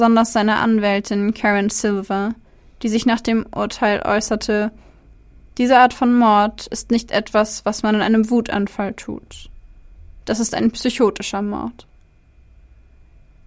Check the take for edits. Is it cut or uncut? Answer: uncut